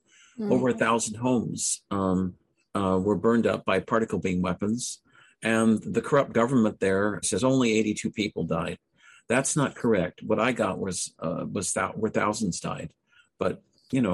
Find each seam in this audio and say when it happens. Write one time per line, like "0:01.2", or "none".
0:07.2